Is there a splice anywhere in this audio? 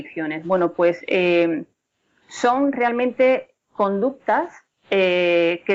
no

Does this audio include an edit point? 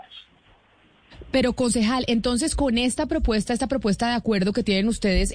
no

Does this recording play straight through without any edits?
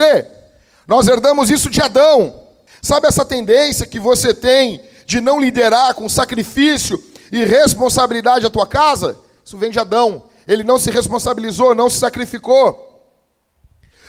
no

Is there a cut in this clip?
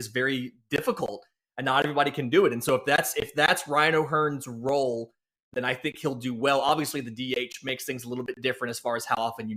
no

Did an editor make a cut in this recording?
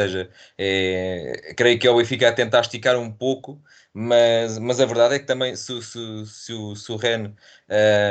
no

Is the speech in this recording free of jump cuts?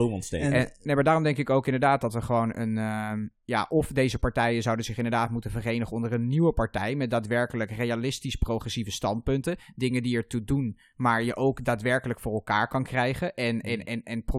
yes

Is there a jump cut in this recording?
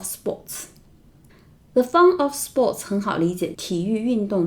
yes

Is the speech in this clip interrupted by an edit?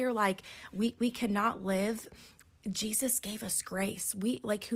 no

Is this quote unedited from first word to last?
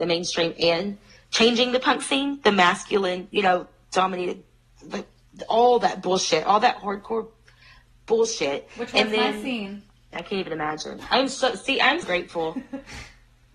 no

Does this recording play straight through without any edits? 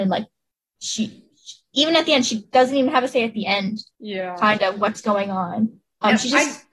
no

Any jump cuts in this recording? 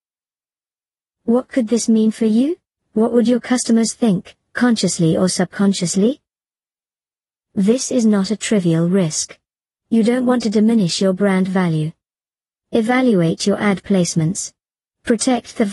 yes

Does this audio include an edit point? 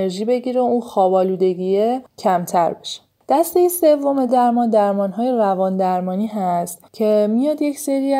no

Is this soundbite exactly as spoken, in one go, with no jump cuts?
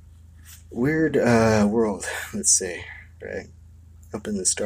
yes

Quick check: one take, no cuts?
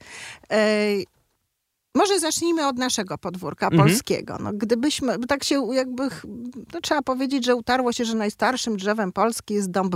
yes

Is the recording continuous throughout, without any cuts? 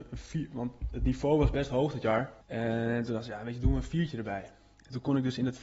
no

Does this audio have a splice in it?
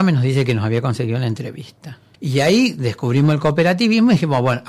yes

